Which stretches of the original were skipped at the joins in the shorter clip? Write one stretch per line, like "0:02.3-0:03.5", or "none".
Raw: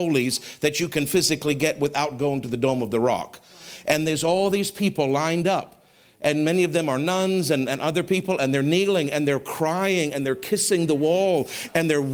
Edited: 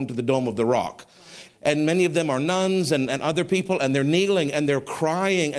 0:03.8-0:06.1